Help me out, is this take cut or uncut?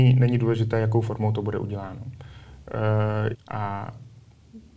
cut